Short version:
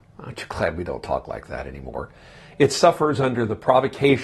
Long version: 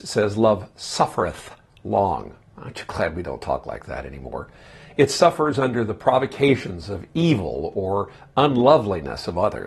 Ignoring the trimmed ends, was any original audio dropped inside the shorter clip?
no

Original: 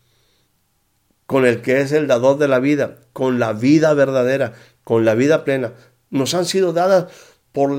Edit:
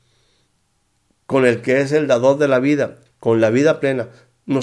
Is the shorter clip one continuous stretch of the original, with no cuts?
no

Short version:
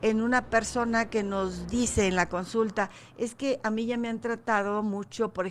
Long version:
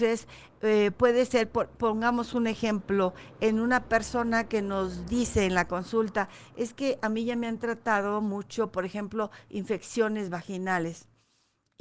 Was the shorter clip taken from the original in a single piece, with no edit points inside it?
yes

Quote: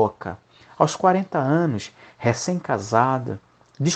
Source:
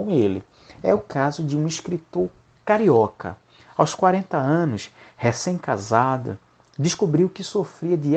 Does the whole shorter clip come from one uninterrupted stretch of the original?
yes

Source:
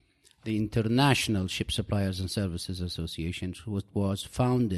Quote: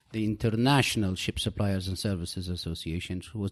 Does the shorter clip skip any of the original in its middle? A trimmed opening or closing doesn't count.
no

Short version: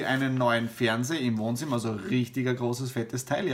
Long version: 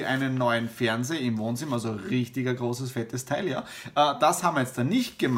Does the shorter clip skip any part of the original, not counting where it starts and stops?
no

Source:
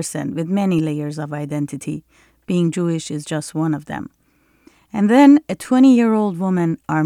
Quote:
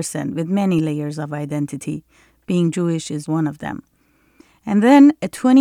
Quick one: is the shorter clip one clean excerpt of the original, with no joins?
no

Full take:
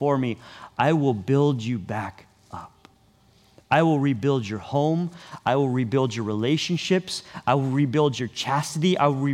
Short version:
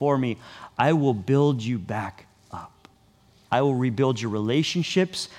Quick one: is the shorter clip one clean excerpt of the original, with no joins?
no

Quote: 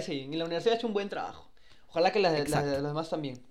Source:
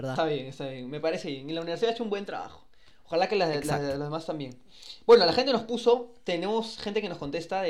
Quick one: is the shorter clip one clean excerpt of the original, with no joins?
yes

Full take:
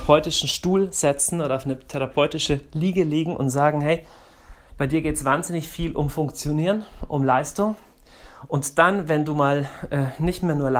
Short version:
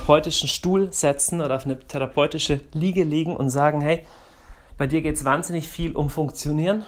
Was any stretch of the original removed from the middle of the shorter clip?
no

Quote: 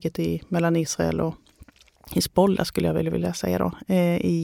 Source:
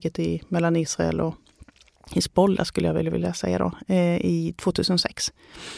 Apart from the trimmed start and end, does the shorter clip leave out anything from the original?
no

